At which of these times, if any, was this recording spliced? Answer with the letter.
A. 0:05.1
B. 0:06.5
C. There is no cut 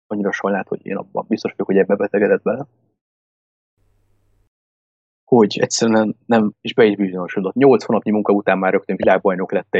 B